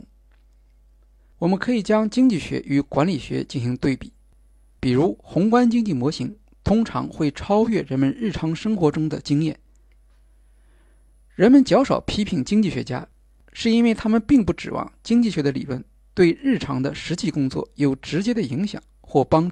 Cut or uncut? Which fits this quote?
cut